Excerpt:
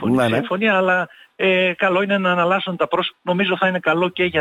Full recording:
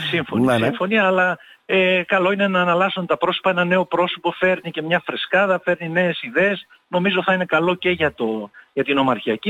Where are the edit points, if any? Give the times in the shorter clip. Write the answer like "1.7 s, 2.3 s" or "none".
3.1 s